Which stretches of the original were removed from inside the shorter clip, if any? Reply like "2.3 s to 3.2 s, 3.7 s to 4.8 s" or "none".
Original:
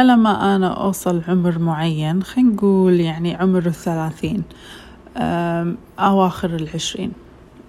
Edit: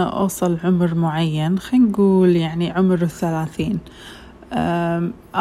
none